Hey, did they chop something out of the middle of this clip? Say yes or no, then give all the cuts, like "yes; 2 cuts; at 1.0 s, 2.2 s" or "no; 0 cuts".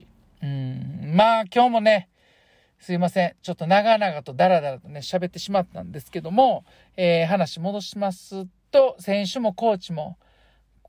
no; 0 cuts